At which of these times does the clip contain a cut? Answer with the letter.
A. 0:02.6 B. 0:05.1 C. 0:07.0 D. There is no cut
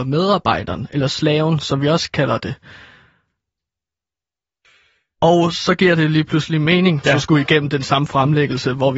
C